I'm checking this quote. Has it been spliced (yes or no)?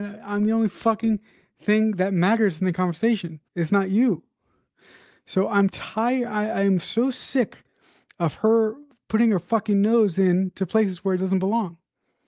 yes